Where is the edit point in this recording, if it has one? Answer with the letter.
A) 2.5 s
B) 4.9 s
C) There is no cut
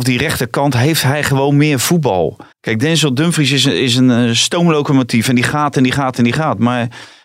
A